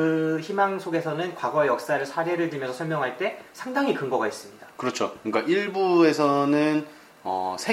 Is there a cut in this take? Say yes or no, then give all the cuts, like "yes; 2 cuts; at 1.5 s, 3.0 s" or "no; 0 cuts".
no; 0 cuts